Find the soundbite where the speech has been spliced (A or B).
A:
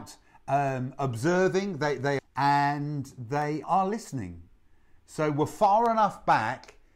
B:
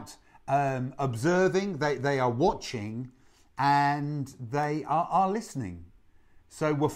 A